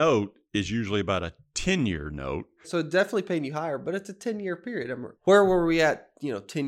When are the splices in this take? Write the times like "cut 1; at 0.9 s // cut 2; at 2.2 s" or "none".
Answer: cut 1; at 2.6 s